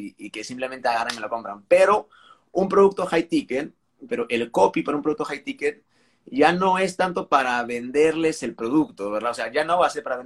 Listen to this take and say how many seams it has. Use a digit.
1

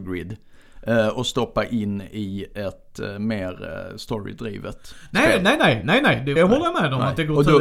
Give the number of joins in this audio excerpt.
1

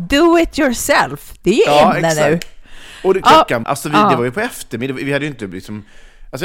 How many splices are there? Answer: 1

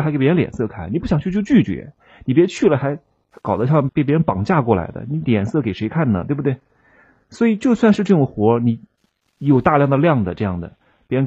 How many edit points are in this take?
1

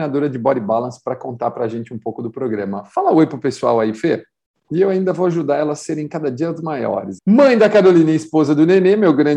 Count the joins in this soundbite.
2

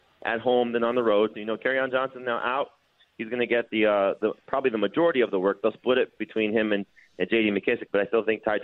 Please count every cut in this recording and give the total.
1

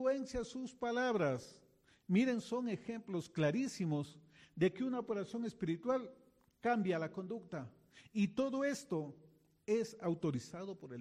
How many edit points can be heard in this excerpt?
0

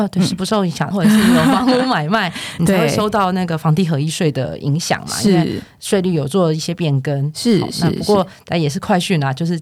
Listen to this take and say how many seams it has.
1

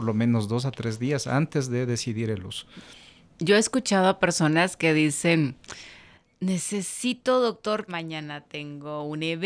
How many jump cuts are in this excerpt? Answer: 1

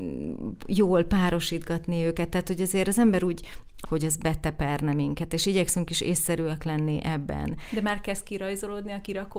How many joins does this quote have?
1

